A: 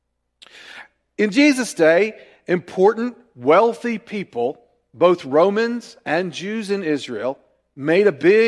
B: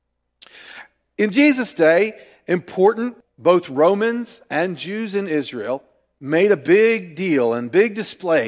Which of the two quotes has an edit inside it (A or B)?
B